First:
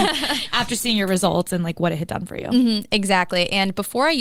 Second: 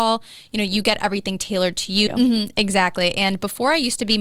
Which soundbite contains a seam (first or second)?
second